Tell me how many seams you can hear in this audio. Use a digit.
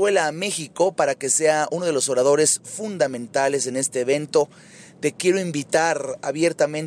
0